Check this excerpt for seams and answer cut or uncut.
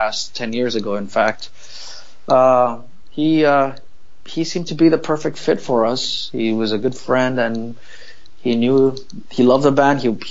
uncut